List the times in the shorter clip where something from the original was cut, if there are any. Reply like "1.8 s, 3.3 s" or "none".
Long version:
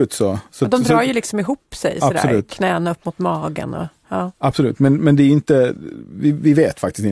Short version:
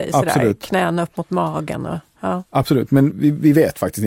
3.1 s